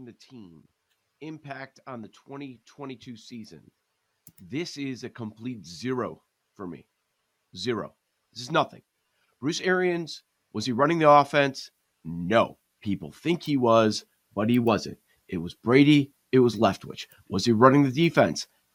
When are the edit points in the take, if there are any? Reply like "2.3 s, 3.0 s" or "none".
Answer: none

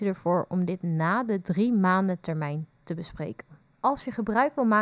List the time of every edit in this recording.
3.7 s

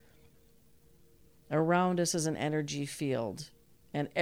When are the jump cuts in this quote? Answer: none

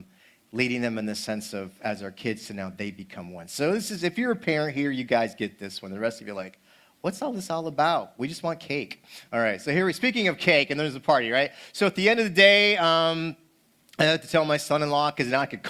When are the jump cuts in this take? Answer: none

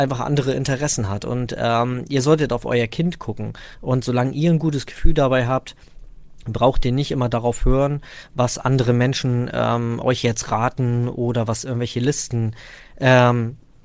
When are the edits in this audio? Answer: none

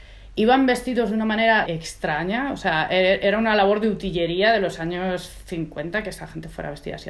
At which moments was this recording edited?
1.6 s

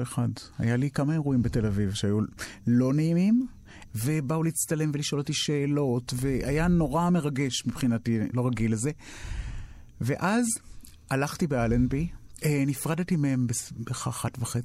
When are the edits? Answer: 3.9 s, 8.3 s

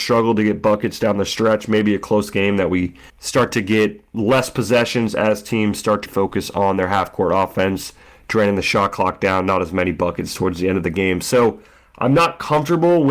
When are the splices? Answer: 3.1 s, 6.1 s

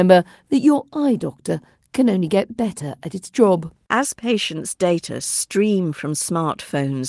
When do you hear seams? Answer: 3.9 s

